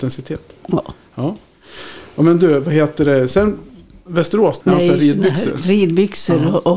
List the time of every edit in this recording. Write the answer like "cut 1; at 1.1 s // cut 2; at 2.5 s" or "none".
cut 1; at 4.6 s